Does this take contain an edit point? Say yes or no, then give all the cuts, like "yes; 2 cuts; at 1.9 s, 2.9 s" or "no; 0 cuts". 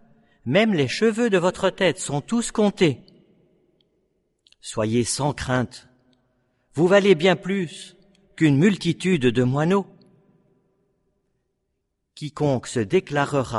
no; 0 cuts